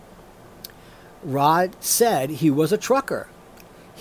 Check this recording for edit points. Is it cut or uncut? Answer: uncut